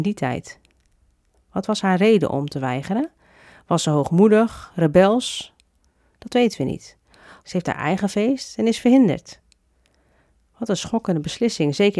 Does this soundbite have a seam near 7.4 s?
yes; 1 cut; at 7.4 s

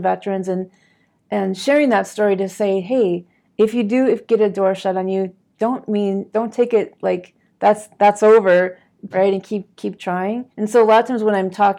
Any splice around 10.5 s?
yes; 2 cuts; at 9.1 s, 10.5 s

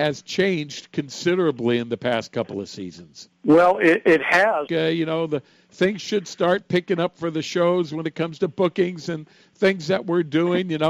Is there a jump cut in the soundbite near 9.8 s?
no; 2 cuts; at 3.3 s, 4.7 s

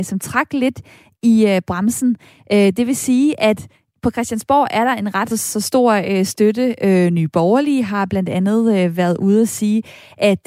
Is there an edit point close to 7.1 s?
no; 1 cut; at 5.3 s

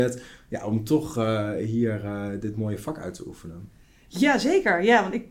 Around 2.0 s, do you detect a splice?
no; 0 cuts

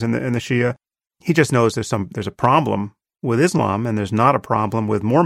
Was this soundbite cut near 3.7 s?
no; 1 cut; at 1.0 s

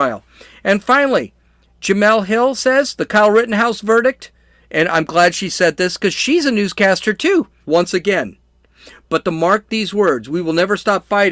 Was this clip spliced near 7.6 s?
yes; 1 cut; at 7.6 s

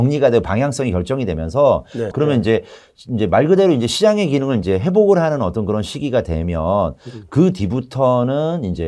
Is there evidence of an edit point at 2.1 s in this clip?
yes; 1 cut; at 2.1 s

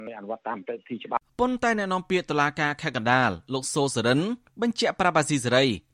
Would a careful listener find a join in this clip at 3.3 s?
no; 1 cut; at 1.3 s

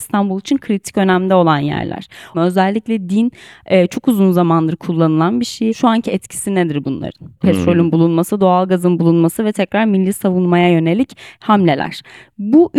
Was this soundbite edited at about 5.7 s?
no; 2 cuts; at 2.3 s, 7.4 s

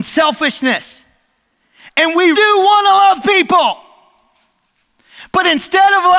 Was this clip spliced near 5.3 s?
no; 1 cut; at 2.3 s

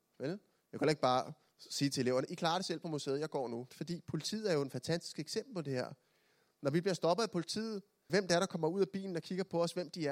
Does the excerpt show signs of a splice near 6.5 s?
no; 2 cuts; at 3.7 s, 8.1 s

